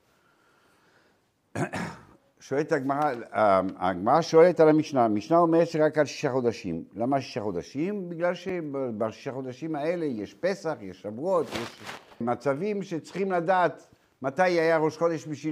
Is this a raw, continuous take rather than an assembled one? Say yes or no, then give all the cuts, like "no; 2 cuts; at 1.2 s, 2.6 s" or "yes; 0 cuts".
no; 1 cut; at 12.2 s